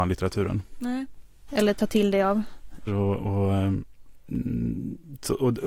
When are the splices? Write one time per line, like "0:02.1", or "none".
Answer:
0:01.5
0:02.9